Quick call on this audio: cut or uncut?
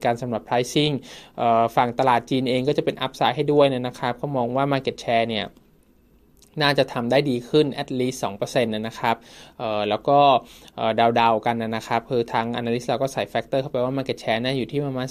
uncut